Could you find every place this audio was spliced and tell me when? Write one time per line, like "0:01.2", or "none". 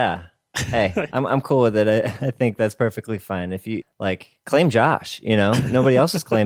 0:03.8